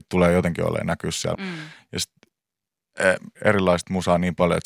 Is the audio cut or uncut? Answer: cut